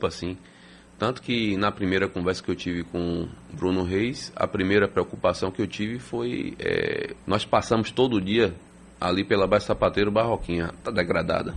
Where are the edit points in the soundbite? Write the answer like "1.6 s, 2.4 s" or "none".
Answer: 7.2 s